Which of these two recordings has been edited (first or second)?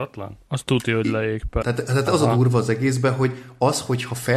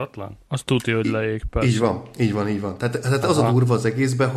first